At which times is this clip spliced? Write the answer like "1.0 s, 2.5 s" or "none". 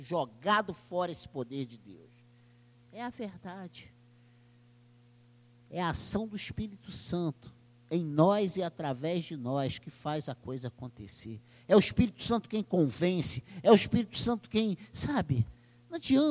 2.7 s